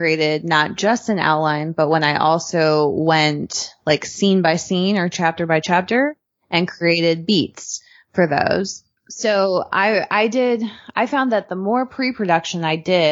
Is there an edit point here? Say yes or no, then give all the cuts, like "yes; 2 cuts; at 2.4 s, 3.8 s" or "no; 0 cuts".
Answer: no; 0 cuts